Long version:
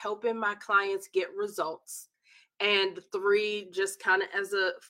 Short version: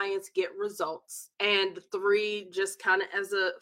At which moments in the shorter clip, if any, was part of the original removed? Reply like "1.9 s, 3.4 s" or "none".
1.3 s